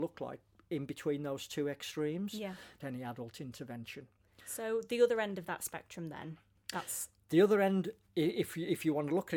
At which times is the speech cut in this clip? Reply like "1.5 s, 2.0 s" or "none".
2.8 s